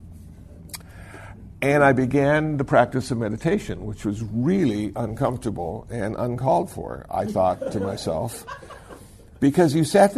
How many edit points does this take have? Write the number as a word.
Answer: zero